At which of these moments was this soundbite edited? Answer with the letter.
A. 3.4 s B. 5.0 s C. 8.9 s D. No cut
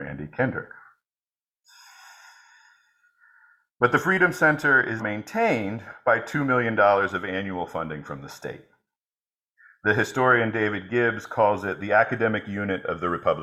B